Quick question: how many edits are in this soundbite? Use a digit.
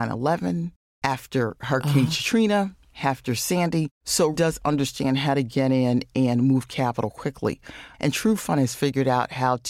2